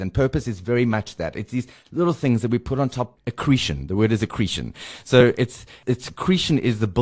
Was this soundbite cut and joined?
no; 0 cuts

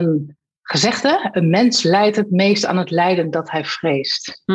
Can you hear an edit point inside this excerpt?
no; 0 cuts

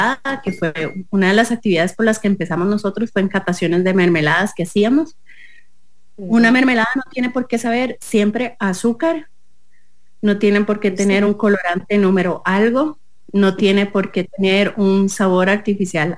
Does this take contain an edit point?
no; 0 cuts

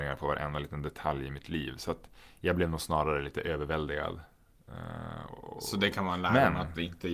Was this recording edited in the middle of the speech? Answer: no; 0 cuts

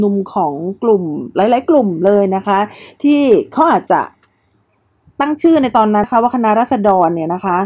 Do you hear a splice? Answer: yes; 1 cut; at 6.0 s

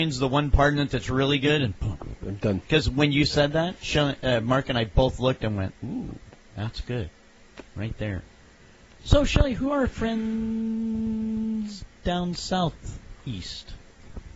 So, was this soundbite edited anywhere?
yes; 1 cut; at 2.2 s

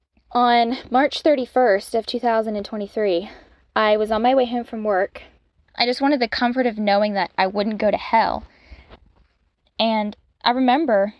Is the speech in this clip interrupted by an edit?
yes; 2 cuts; at 5.7 s, 9.6 s

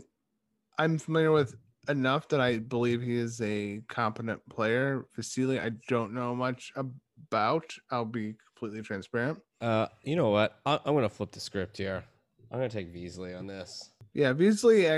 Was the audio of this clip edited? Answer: no; 0 cuts

